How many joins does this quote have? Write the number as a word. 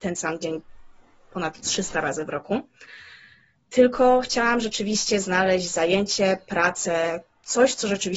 zero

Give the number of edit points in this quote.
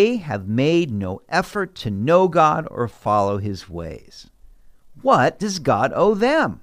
zero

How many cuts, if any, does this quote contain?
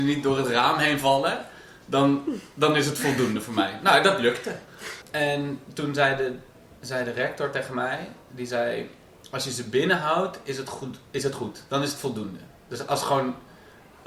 one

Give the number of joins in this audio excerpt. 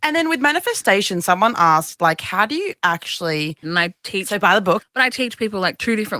two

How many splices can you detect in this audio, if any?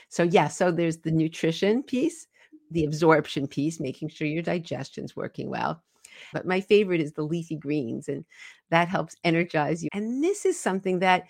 two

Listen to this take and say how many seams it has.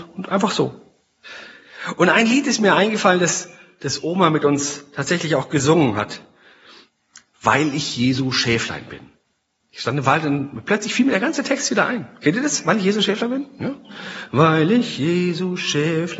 zero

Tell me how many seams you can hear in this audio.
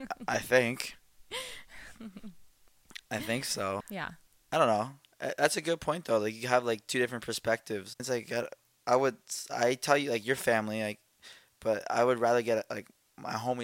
two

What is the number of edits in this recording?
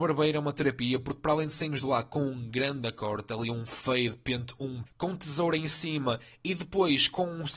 one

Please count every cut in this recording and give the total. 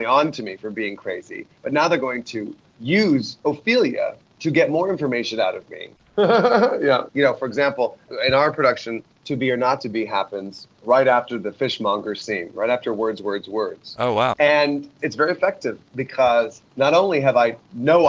three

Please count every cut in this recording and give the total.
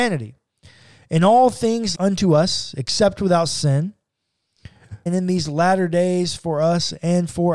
two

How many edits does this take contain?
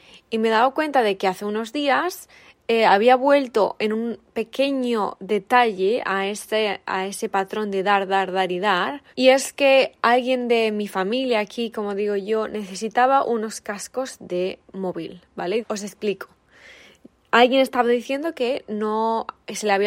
two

